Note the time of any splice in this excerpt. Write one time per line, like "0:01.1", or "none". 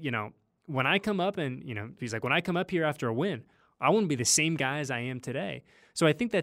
0:02.0